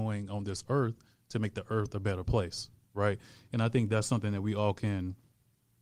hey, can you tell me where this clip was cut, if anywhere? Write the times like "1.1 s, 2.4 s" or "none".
none